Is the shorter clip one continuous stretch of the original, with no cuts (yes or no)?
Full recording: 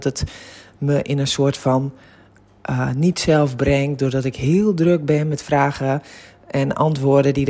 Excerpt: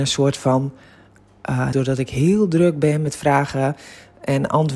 no